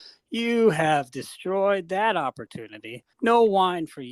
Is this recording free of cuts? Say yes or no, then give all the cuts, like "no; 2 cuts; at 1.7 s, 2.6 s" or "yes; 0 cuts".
no; 1 cut; at 3.1 s